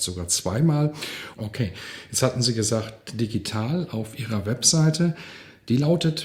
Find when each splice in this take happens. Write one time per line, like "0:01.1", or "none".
0:01.3